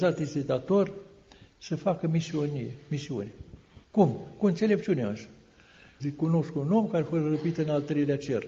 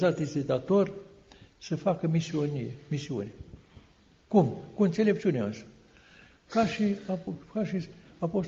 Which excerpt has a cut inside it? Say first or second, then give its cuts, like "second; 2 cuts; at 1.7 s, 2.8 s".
first; 2 cuts; at 3.8 s, 6.0 s